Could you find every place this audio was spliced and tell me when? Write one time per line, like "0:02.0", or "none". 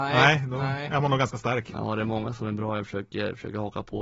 0:01.7